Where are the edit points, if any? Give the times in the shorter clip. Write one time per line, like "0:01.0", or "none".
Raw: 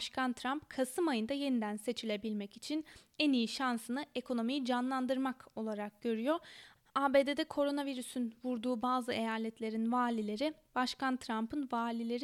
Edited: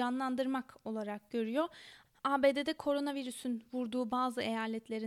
none

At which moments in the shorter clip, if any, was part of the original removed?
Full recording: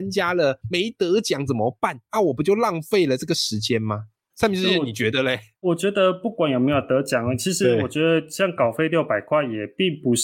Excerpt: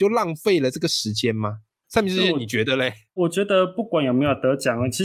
none

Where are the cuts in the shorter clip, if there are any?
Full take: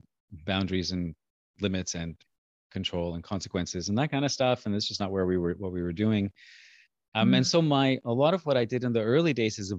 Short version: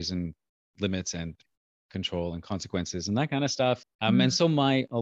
0:03.8

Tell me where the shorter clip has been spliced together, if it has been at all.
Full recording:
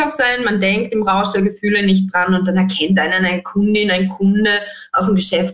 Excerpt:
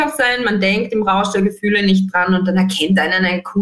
none

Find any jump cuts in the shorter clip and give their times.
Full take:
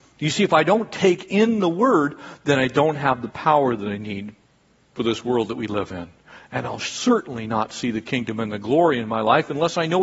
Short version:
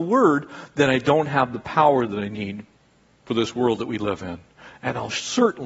none

